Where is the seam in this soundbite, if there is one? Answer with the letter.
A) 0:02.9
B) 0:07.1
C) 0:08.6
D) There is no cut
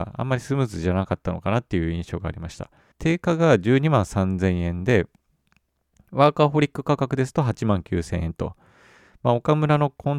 A